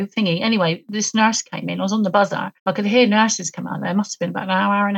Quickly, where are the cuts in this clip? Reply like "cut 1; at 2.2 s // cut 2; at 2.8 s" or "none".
cut 1; at 2.6 s

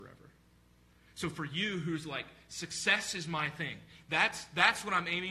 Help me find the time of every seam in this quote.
none

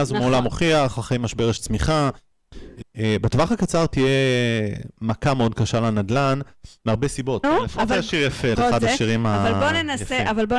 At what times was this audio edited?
cut 1; at 2.8 s // cut 2; at 7.4 s // cut 3; at 8.5 s

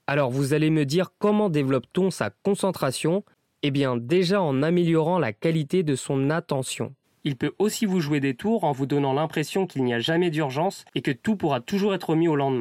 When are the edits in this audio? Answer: cut 1; at 7.0 s

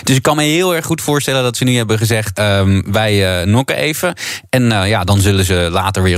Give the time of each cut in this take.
cut 1; at 2.3 s

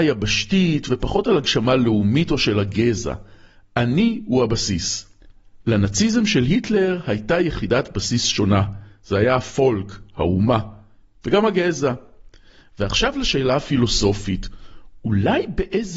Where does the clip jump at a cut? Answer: none

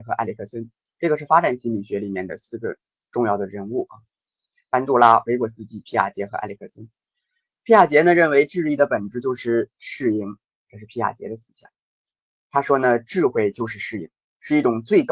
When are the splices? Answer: none

